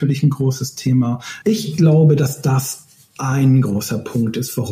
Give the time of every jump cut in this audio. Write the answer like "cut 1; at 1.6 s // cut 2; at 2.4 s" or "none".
cut 1; at 1.4 s